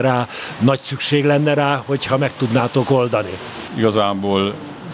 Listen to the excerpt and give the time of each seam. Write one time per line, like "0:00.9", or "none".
0:03.7

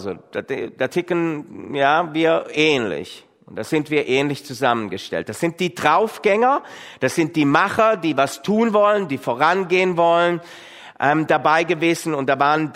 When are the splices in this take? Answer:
none

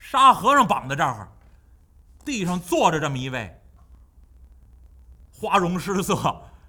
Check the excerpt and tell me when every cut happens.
0:02.0

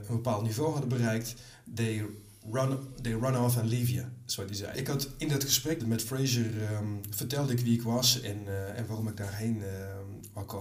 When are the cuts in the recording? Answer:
0:04.7
0:05.8

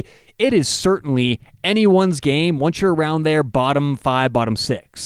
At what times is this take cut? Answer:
none

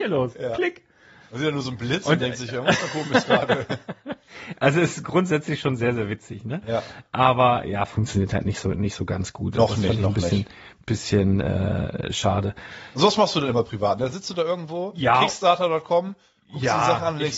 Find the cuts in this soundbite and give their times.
none

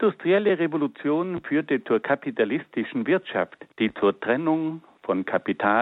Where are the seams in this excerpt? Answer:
0:03.7

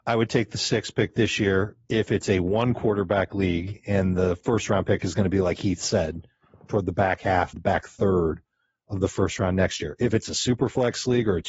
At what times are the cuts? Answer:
0:07.5

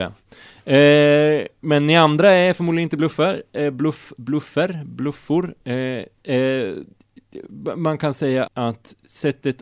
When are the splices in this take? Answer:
0:08.5

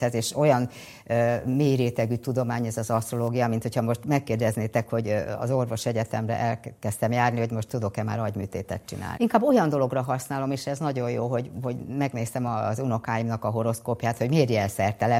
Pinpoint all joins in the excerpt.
0:09.2

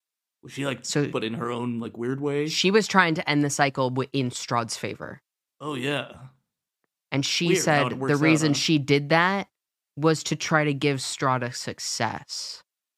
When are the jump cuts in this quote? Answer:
0:01.1
0:05.5

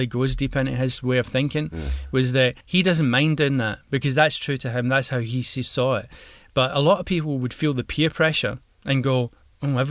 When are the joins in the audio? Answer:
0:02.6

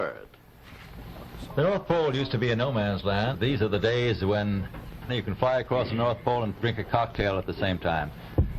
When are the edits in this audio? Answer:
0:03.3
0:05.1

